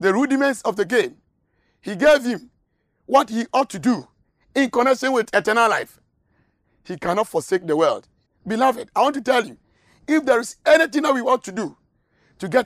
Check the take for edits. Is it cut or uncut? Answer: cut